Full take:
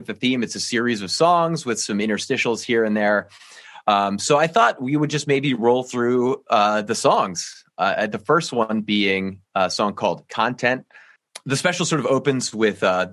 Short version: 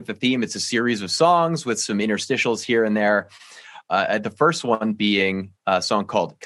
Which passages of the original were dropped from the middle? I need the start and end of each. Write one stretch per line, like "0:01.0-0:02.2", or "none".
0:03.8-0:07.7